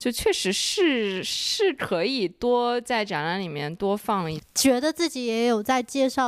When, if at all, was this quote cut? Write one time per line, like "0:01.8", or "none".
0:04.4

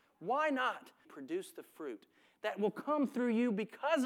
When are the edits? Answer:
0:01.0

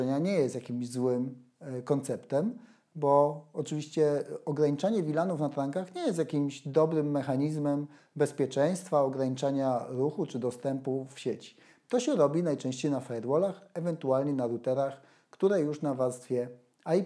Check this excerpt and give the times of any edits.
none

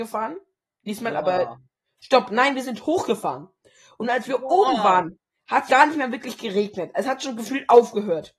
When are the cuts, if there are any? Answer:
0:05.7

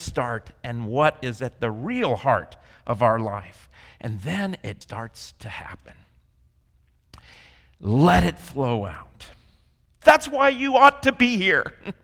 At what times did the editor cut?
0:04.8
0:10.0

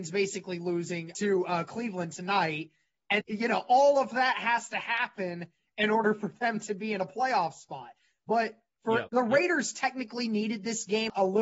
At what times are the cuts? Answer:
0:03.2
0:09.1

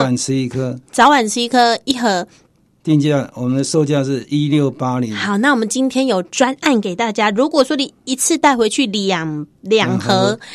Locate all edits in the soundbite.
none

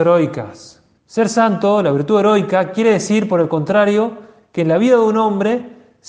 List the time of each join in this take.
0:01.0

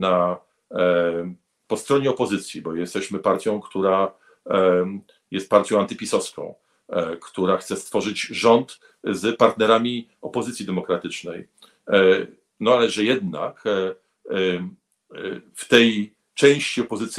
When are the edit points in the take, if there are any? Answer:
none

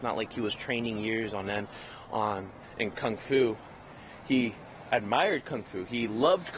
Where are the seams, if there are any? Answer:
none

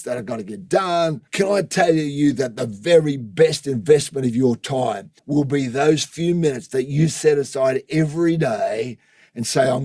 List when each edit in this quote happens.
0:01.3
0:05.2

